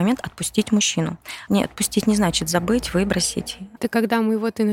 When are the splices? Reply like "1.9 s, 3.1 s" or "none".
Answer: 1.5 s, 3.8 s